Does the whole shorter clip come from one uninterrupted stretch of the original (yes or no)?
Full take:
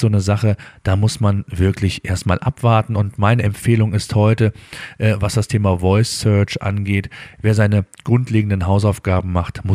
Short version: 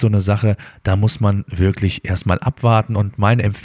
yes